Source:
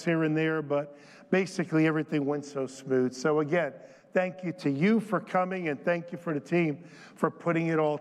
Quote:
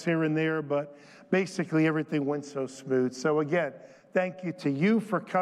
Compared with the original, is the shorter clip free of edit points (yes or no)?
yes